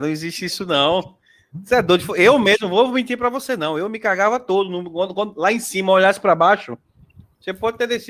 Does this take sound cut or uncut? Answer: uncut